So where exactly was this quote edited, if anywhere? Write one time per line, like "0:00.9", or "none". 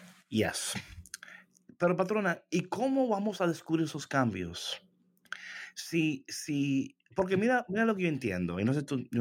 none

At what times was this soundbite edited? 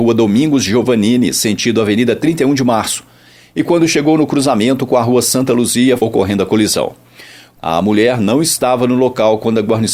0:06.0
0:07.6

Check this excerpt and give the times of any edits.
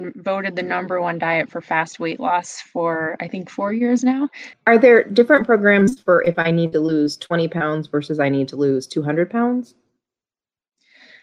0:04.5

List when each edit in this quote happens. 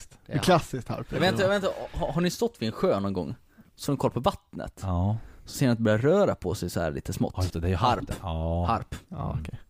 0:07.5

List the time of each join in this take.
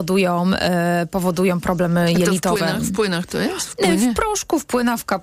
none

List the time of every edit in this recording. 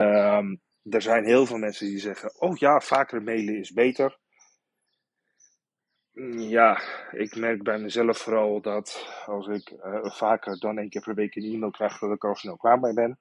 none

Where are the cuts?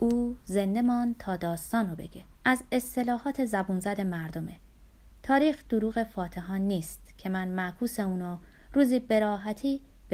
0:02.3

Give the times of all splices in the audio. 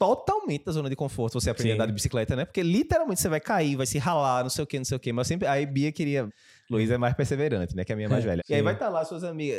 0:06.3
0:08.4

